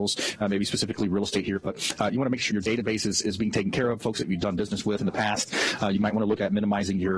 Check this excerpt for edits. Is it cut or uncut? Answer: cut